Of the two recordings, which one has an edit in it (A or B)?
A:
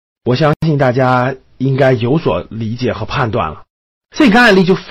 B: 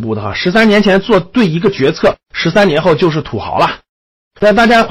A